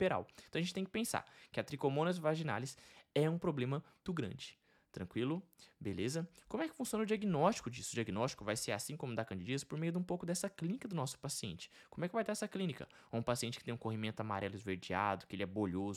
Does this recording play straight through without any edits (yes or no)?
no